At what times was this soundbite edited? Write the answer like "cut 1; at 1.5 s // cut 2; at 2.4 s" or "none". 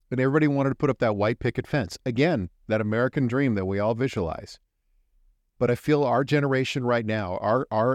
none